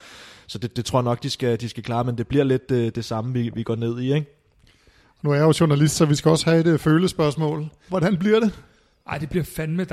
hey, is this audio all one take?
no; 1 cut; at 7.9 s

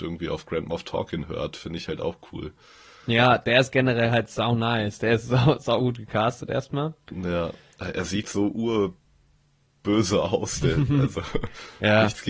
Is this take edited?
yes; 1 cut; at 8.2 s

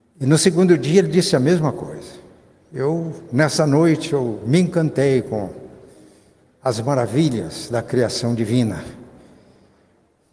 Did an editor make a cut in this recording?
no; 0 cuts

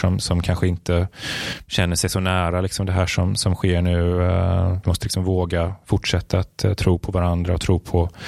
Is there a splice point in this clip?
yes; 1 cut; at 4.8 s

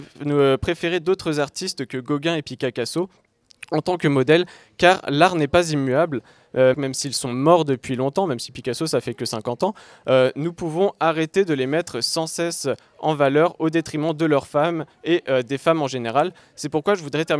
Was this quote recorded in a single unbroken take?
no; 1 cut; at 6.7 s

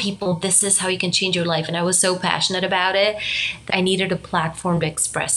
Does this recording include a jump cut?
yes; 1 cut; at 3.7 s

